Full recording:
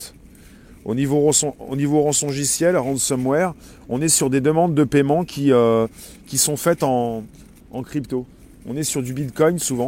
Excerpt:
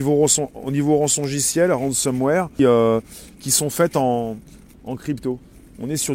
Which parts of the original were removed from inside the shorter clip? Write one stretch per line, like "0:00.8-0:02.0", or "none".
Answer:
0:03.6-0:05.5